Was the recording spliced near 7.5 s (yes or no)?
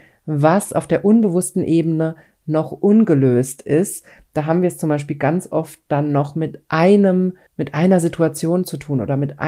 yes